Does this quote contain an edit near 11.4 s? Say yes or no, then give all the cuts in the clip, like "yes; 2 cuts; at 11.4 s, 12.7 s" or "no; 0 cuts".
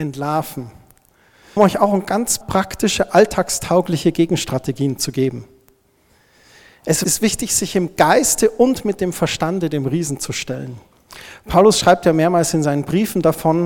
no; 1 cut; at 1.6 s